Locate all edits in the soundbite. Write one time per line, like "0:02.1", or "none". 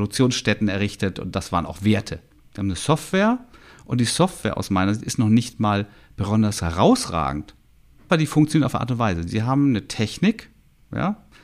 0:02.4
0:08.1
0:09.3